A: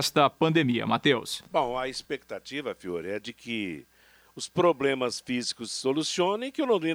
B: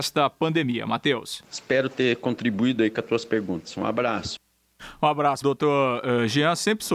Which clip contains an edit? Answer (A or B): B